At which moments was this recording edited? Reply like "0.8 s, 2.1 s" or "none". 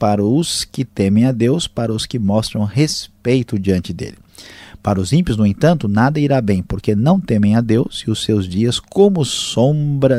none